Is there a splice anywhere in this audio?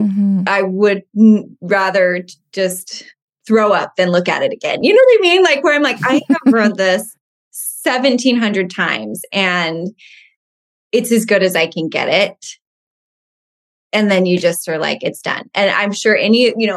no; 0 cuts

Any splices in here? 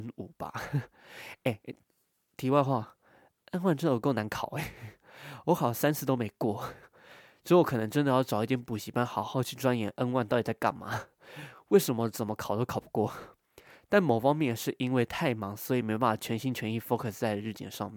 no; 0 cuts

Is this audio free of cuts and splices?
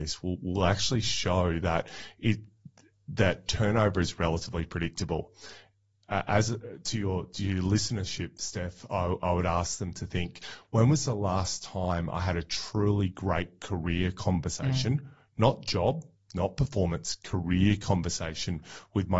yes; 0 cuts

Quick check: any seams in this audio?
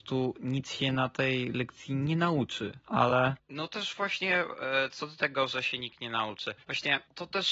no; 0 cuts

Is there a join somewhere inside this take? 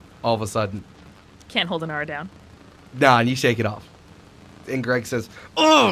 no; 0 cuts

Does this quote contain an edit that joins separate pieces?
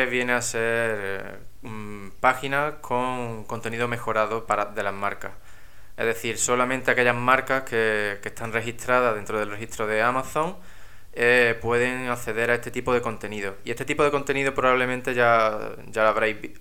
no; 0 cuts

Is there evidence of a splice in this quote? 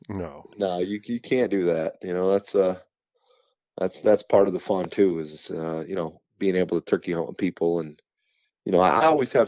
no; 0 cuts

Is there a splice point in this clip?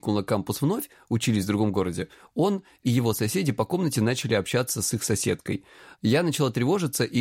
no; 0 cuts

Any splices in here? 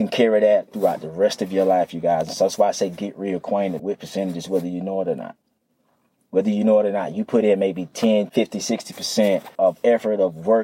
yes; 3 cuts; at 3.8 s, 8.3 s, 9.5 s

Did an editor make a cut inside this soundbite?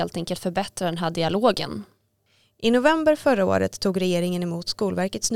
no; 0 cuts

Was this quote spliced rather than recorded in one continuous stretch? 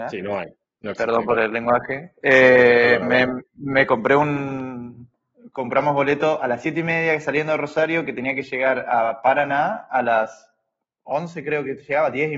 no; 0 cuts

